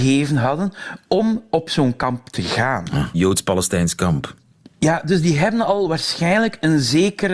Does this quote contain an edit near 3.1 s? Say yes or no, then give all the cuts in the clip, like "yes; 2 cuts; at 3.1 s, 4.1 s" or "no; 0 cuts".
yes; 1 cut; at 3.1 s